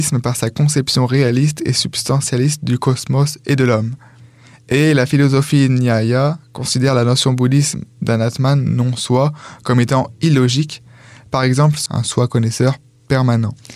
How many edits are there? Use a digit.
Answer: 1